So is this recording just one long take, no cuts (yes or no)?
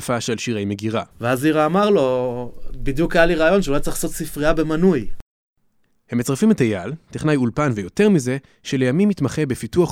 no